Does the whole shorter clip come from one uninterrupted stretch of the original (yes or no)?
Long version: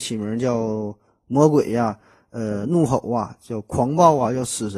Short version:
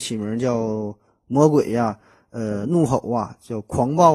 yes